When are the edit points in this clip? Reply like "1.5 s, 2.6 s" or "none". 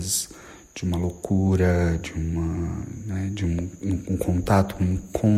none